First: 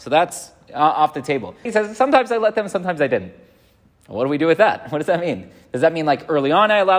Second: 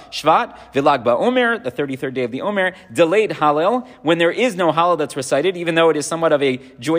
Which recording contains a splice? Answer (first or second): first